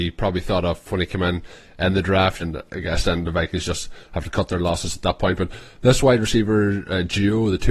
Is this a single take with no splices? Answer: no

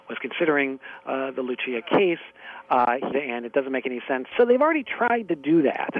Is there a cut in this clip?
yes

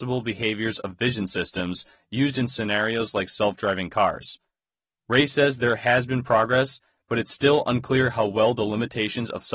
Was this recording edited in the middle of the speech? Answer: no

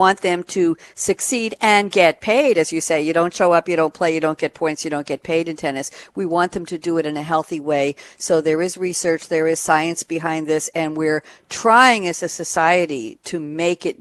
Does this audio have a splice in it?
no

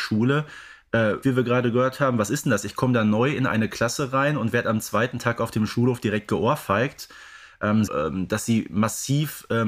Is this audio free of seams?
no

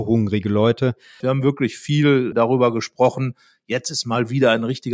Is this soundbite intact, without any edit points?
no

